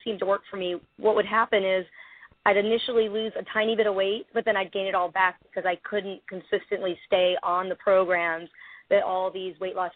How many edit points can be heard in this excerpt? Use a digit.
0